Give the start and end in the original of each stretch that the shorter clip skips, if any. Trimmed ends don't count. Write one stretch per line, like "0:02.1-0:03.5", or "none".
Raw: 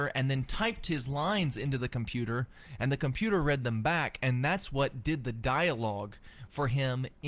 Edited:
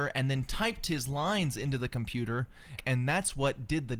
0:02.8-0:04.1